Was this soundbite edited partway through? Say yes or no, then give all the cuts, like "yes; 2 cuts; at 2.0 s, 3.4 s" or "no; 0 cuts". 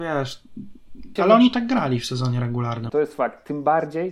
yes; 2 cuts; at 1.2 s, 2.9 s